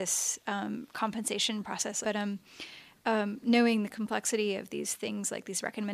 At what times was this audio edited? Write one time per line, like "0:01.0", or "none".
0:02.0

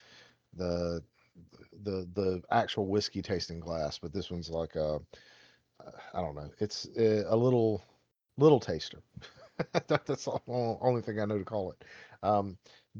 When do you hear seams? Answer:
none

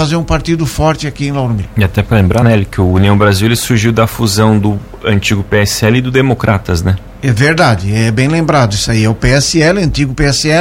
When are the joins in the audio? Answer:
none

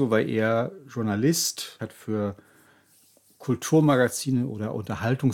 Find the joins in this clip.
0:01.8

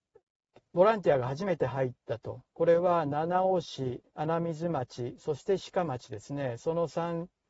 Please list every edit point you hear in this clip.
0:04.1

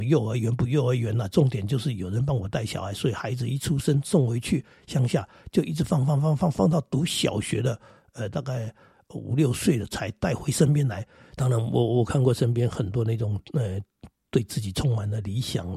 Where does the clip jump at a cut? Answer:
0:11.4

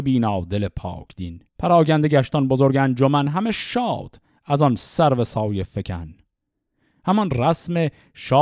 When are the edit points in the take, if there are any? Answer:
0:01.5

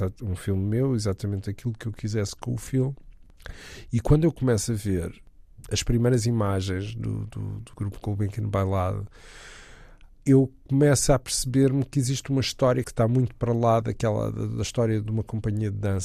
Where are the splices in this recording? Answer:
0:15.1

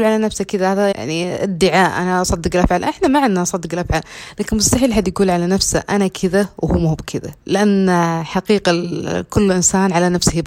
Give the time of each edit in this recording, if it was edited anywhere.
0:00.9
0:07.4

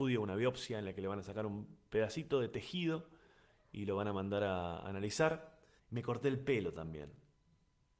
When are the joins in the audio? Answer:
0:05.8

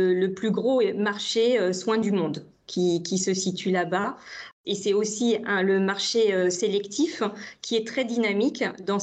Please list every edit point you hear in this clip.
none

